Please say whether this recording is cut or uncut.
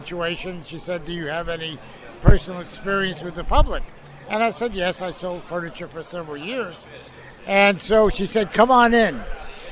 cut